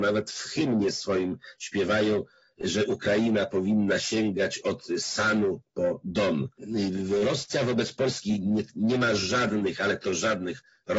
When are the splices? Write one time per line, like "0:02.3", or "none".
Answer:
none